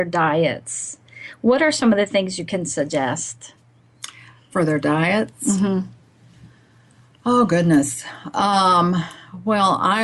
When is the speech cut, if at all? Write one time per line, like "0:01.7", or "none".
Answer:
none